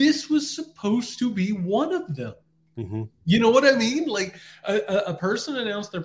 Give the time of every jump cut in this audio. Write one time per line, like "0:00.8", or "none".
none